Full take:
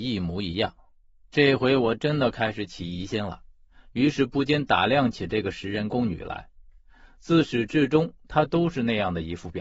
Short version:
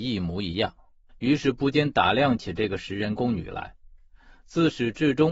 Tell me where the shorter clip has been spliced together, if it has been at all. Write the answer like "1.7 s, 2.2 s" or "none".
1.1 s